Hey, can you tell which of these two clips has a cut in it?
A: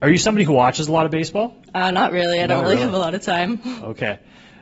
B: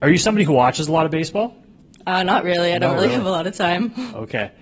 A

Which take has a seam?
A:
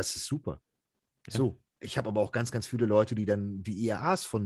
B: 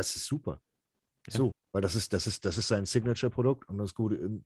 B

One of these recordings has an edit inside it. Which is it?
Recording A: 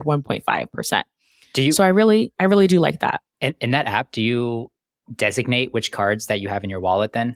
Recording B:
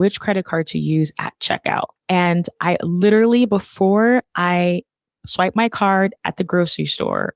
B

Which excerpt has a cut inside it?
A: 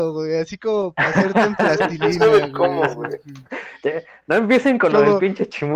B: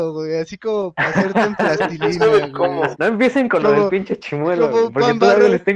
B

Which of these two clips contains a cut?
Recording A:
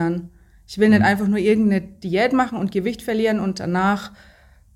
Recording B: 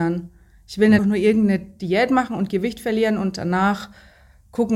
B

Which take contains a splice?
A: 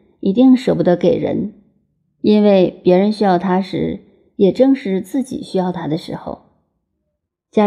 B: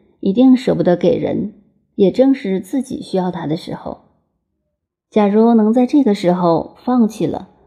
B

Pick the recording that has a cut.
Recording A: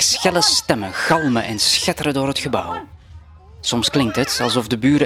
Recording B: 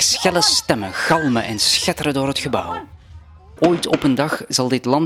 B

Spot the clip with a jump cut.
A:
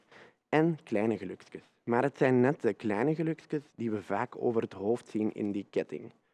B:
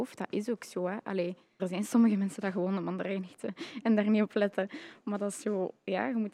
B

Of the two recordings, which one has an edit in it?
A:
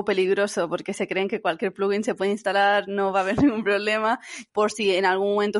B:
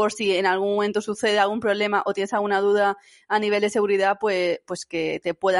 A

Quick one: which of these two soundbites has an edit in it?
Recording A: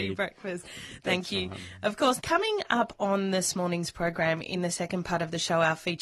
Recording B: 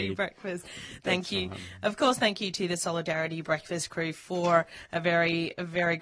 A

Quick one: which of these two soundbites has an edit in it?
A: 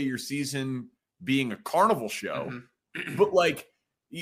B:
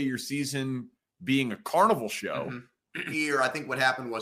B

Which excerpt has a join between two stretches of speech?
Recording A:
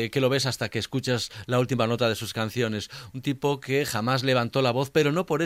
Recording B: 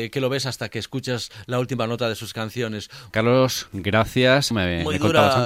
B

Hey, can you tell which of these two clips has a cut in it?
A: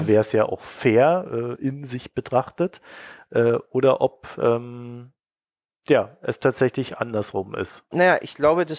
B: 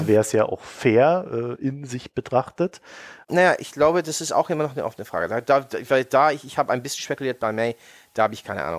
B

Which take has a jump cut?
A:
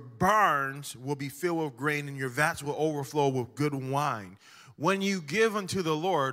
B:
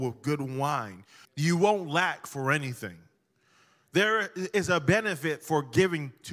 B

